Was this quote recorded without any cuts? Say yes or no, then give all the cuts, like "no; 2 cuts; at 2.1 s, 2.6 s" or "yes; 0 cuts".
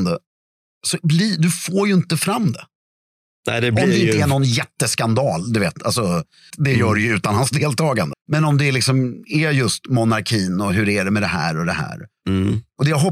no; 2 cuts; at 6.5 s, 8.1 s